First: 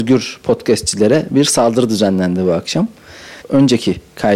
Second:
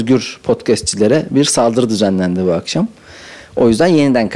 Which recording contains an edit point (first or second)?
first